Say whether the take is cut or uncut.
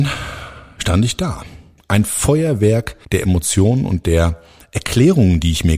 cut